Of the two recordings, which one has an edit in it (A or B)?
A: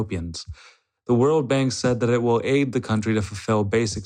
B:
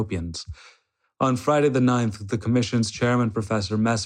A